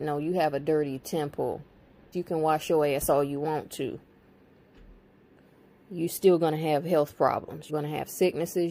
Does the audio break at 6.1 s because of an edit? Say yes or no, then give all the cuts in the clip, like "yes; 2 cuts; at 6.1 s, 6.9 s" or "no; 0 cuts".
no; 2 cuts; at 2.1 s, 7.7 s